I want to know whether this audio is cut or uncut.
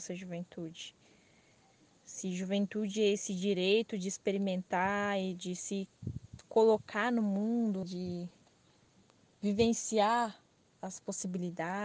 cut